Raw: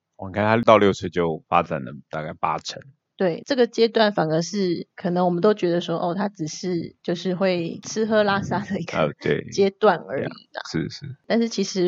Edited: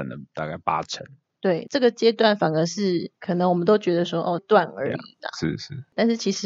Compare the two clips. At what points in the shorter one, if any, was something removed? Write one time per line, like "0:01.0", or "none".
0:04.4